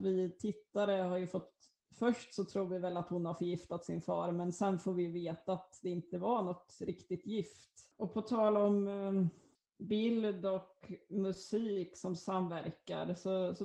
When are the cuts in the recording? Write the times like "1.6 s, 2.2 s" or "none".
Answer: none